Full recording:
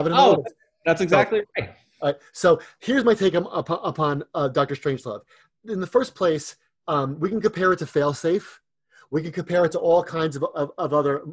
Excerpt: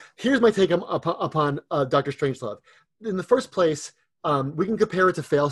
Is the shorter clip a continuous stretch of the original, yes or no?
yes